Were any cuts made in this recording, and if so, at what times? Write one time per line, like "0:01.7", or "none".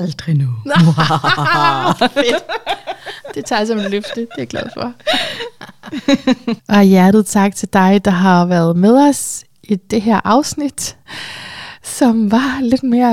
none